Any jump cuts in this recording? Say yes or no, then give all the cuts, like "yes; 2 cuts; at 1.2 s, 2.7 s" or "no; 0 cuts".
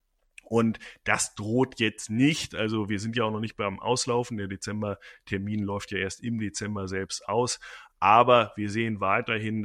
no; 0 cuts